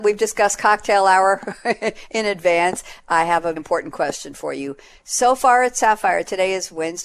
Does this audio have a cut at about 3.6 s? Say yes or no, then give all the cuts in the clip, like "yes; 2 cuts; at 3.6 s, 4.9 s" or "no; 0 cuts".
yes; 1 cut; at 3.6 s